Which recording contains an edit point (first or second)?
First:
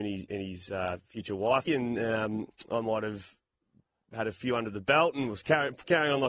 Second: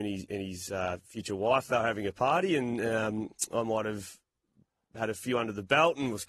first